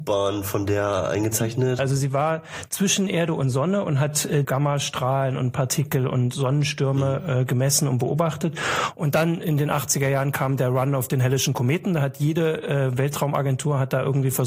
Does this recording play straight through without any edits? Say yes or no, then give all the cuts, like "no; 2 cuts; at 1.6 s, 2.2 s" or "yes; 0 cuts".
no; 2 cuts; at 1.8 s, 4.4 s